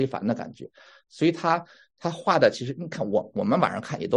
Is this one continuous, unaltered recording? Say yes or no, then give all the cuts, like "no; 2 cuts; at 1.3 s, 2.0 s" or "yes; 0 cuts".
yes; 0 cuts